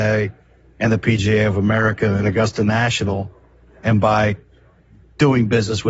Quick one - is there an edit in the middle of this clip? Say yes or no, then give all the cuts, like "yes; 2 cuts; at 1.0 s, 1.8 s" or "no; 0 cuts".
no; 0 cuts